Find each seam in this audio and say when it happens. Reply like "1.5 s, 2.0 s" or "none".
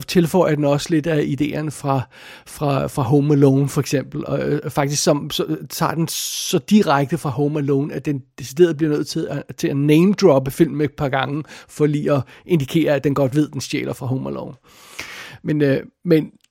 none